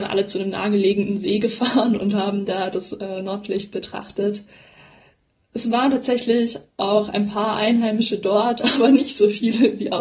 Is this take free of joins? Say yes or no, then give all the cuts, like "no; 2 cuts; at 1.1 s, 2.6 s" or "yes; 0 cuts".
yes; 0 cuts